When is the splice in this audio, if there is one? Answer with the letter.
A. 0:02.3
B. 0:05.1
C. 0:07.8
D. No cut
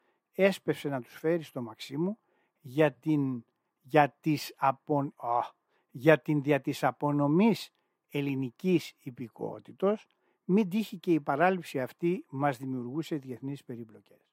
B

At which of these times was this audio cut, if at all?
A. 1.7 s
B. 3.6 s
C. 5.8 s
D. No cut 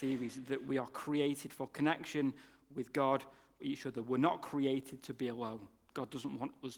B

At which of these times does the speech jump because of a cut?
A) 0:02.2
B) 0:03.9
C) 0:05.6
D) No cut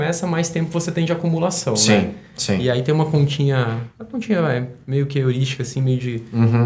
B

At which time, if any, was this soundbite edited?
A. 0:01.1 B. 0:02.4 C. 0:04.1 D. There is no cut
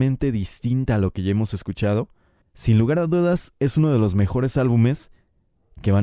B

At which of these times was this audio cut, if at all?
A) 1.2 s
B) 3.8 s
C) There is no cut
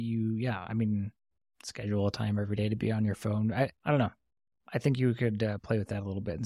B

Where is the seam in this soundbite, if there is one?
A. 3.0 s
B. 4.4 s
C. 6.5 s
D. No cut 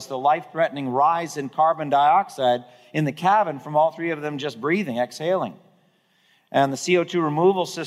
D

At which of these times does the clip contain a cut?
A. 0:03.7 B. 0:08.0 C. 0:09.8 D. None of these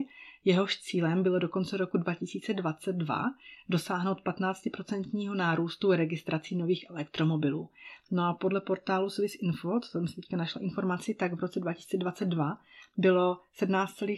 D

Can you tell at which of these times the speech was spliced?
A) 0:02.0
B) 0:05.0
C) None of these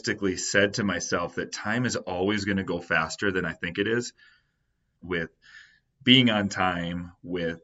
B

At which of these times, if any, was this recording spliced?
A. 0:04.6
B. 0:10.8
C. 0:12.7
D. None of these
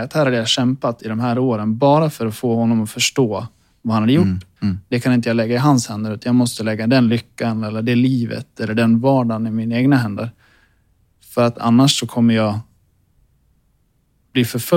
A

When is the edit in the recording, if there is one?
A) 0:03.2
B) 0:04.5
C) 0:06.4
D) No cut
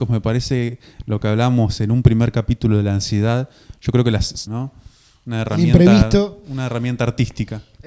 B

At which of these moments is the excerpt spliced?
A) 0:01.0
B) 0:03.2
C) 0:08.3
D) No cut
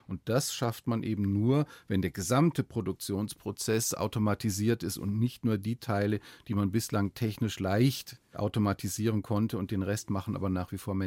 C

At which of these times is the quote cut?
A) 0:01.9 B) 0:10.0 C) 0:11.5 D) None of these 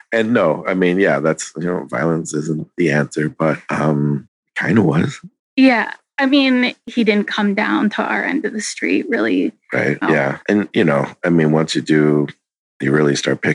B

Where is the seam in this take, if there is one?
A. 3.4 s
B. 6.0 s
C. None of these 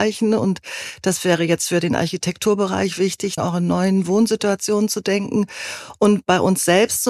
A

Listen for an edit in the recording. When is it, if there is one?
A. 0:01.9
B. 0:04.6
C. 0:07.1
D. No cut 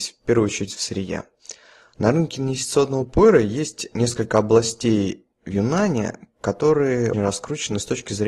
C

